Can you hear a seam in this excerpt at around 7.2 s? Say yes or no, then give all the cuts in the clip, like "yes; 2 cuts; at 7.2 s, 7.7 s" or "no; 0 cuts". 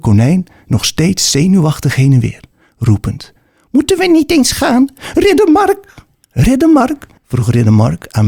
yes; 2 cuts; at 5.1 s, 7.2 s